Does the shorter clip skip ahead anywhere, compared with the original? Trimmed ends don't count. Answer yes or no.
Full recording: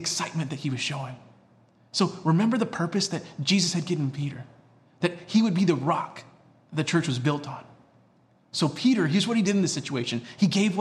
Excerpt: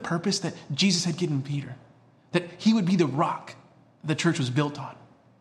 no